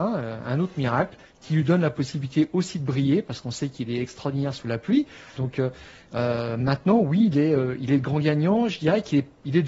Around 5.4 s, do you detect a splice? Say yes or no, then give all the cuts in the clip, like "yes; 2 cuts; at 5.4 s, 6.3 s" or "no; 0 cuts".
yes; 1 cut; at 5.4 s